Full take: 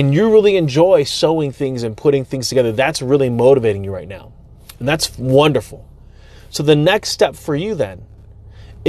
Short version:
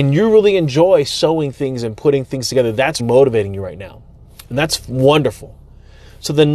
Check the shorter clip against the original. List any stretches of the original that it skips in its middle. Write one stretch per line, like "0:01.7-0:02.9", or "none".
0:03.0-0:03.3